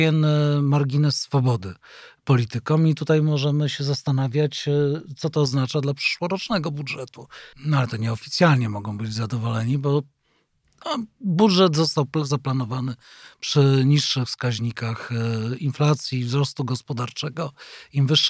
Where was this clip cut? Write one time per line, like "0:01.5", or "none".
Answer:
0:07.5